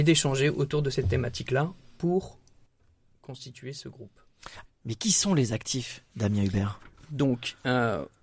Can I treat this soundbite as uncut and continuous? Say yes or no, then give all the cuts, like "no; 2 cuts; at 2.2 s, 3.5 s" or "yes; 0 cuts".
no; 1 cut; at 4.6 s